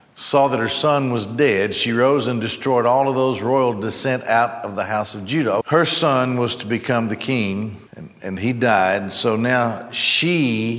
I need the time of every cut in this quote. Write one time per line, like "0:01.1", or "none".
0:05.6
0:07.9